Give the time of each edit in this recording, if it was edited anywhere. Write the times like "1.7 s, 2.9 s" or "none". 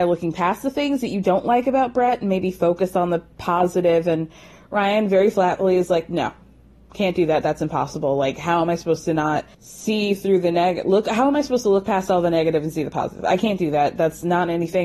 9.5 s

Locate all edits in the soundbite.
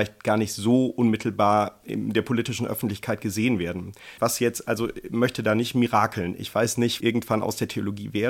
4.2 s, 7.0 s

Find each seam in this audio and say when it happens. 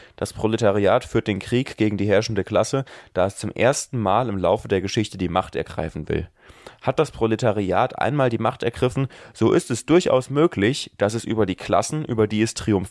none

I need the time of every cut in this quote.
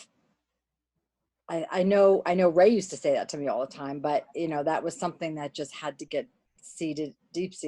none

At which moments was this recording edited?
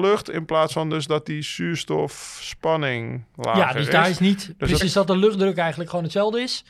4.8 s

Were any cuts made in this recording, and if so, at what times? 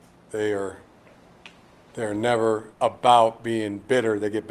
2.7 s

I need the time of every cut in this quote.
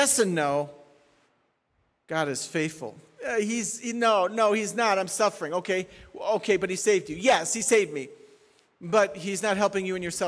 none

